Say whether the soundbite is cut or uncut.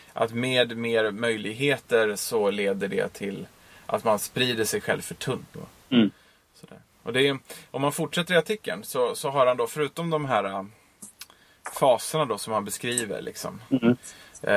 cut